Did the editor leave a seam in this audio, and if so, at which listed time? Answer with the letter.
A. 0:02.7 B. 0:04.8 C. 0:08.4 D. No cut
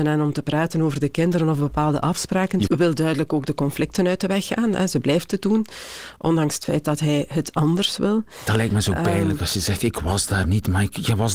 A